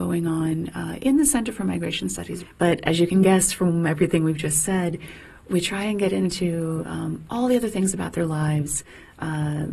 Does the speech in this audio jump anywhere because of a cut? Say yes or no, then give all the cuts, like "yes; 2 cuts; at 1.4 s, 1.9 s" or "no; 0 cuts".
yes; 1 cut; at 2.5 s